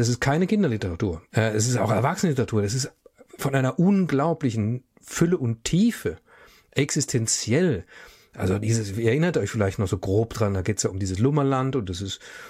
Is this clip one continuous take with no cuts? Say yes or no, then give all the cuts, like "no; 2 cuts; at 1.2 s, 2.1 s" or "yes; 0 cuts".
no; 1 cut; at 1.3 s